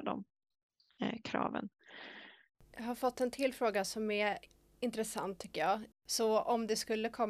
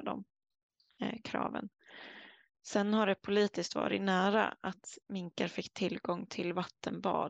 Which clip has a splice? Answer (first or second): first